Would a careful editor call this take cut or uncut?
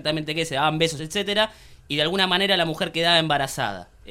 cut